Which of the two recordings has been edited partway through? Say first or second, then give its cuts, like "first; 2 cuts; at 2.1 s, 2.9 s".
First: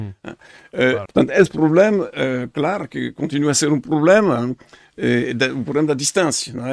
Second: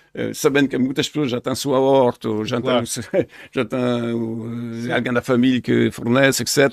first; 1 cut; at 1.1 s